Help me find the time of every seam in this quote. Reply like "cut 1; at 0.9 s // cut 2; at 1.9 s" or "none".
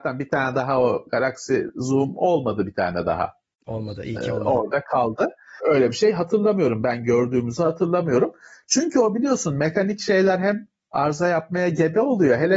cut 1; at 5.6 s